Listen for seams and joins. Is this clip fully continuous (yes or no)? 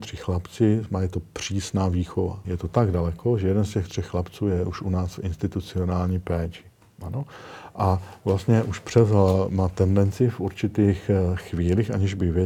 no